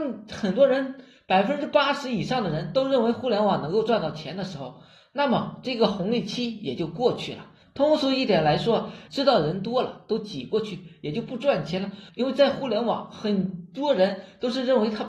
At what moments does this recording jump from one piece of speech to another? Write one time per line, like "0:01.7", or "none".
0:07.6
0:09.1
0:12.1